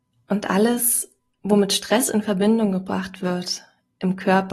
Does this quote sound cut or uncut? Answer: uncut